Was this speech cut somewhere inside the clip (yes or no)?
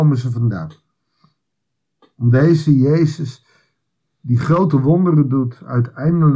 no